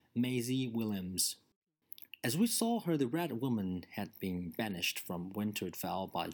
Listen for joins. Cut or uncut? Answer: cut